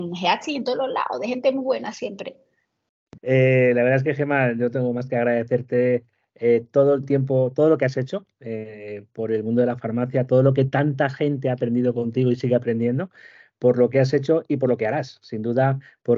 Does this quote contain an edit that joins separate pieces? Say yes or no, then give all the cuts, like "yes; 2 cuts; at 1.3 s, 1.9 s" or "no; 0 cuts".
yes; 1 cut; at 3.2 s